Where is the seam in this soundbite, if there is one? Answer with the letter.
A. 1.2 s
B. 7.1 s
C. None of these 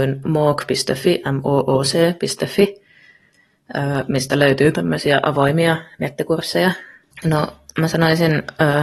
B